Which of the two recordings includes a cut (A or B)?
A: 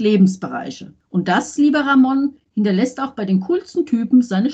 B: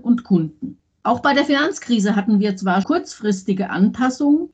B